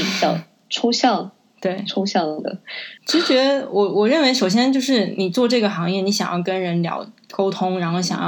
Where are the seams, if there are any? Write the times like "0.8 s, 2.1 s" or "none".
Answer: 3.0 s